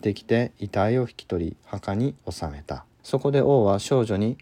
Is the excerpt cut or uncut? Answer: cut